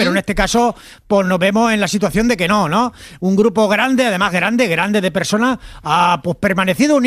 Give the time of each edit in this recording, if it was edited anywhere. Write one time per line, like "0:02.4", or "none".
none